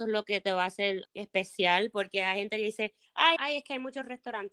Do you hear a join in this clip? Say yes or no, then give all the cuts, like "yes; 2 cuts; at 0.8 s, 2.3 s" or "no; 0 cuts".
yes; 2 cuts; at 1.0 s, 3.4 s